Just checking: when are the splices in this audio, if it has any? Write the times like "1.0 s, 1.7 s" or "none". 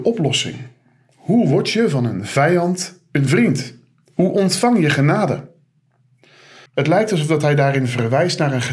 6.7 s